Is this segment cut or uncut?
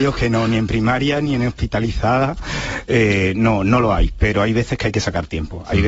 uncut